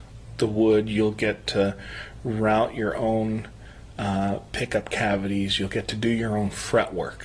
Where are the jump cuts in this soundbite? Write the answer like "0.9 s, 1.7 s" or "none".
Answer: none